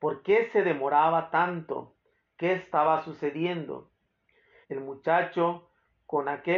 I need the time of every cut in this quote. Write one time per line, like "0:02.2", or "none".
0:04.6